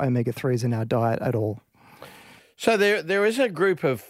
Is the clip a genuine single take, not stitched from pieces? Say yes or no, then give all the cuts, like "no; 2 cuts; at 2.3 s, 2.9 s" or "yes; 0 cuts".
yes; 0 cuts